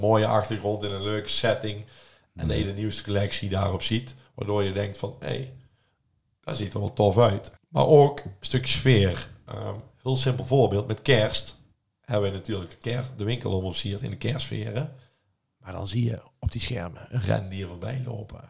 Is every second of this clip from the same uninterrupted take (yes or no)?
no